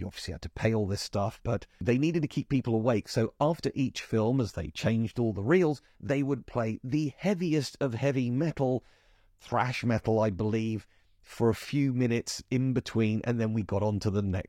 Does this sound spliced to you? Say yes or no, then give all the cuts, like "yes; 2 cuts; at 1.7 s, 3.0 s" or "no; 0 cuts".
no; 0 cuts